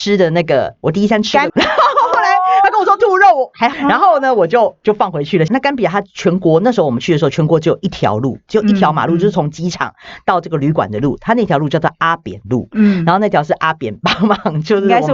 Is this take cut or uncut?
cut